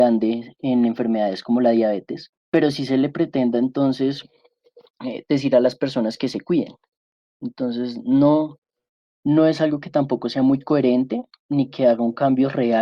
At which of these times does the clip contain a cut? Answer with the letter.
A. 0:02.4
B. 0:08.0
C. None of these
A